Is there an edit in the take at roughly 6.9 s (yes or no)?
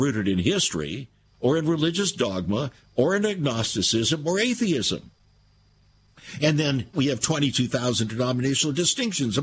yes